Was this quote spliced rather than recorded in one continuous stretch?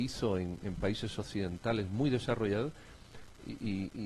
no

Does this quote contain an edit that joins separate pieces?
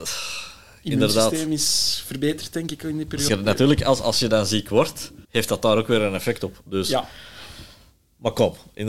yes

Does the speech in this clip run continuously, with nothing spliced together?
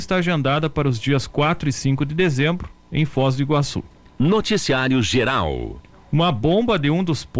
yes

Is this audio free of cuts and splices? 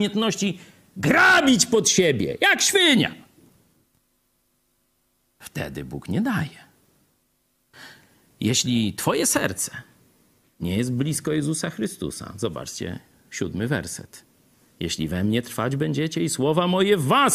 yes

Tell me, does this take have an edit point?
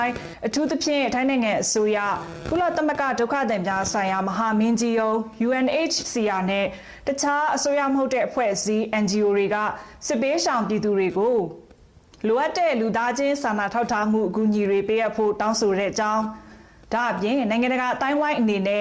no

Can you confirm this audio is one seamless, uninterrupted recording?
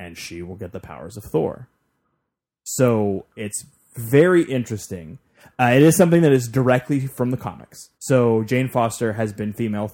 no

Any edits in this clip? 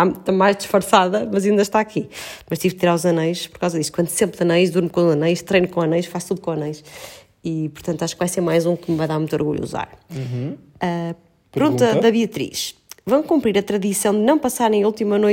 no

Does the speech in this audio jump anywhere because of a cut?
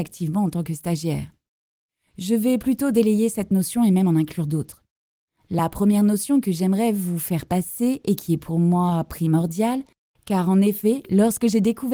no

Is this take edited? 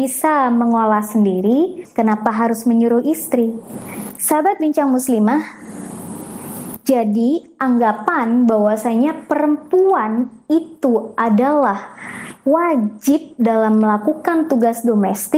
yes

